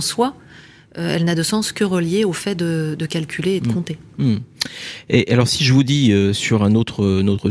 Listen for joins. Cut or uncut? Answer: uncut